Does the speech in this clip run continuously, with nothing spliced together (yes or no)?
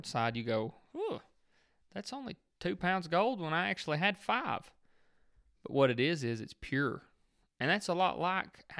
yes